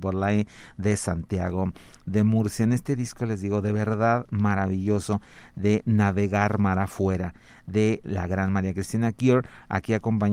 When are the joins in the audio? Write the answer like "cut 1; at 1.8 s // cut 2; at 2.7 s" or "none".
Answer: none